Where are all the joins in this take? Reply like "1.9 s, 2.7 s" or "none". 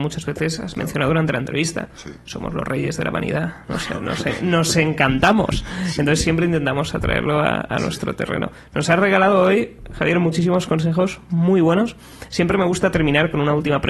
none